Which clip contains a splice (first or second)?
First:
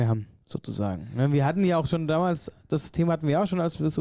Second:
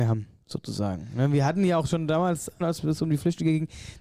second